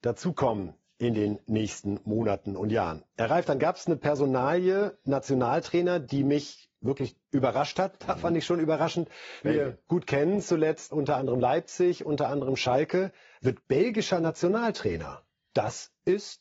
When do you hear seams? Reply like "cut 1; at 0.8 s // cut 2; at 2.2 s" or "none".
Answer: cut 1; at 8.0 s // cut 2; at 9.4 s // cut 3; at 10.9 s